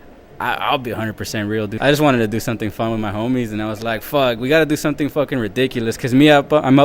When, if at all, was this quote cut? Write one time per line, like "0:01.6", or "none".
0:01.8